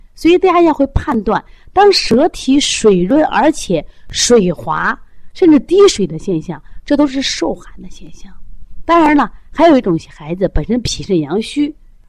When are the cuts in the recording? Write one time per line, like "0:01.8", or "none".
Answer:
none